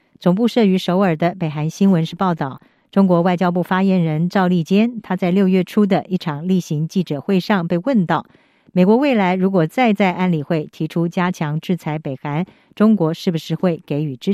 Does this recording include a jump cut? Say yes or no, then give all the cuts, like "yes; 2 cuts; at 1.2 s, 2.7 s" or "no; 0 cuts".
no; 0 cuts